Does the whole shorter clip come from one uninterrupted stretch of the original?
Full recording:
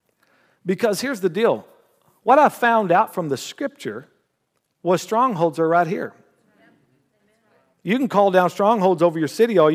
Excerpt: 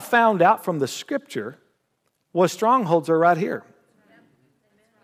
yes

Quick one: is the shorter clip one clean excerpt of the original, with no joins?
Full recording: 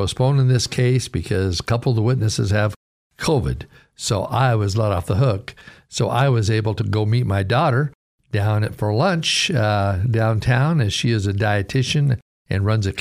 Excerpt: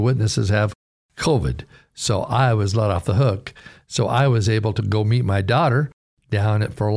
yes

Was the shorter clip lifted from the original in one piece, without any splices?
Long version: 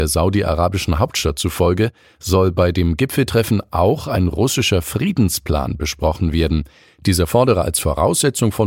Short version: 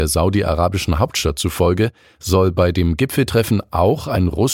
yes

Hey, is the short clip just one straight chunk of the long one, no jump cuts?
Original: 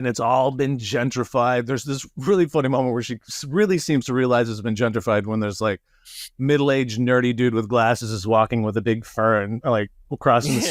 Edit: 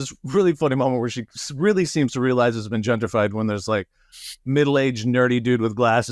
yes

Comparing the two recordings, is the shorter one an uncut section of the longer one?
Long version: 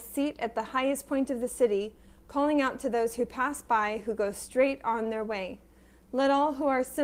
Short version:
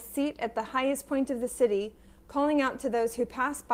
yes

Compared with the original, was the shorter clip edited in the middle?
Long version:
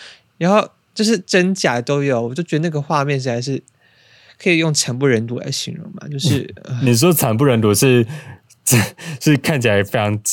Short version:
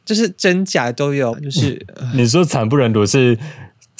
yes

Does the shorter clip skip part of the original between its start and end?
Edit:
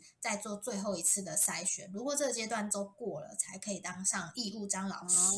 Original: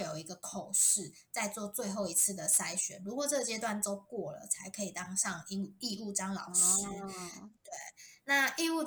yes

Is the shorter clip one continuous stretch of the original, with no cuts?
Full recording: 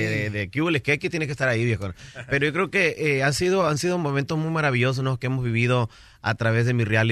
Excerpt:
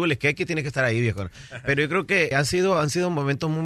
no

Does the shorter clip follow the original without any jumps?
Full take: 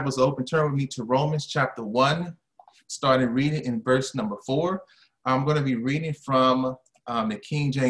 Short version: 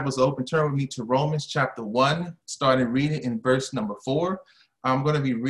no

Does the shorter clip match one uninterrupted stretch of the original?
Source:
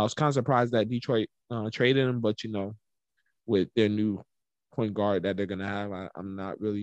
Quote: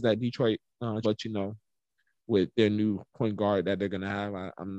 no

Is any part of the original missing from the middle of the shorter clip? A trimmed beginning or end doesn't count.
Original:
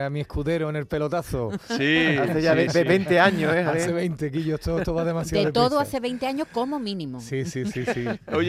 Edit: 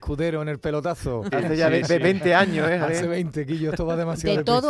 yes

